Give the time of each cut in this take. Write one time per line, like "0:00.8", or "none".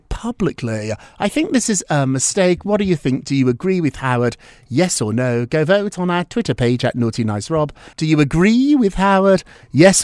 0:07.9